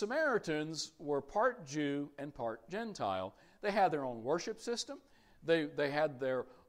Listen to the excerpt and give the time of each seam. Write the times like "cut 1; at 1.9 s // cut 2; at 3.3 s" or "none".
none